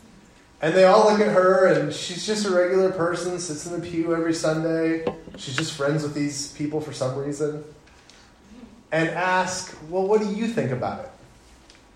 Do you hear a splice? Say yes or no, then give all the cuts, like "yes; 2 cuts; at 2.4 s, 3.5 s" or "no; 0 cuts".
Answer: no; 0 cuts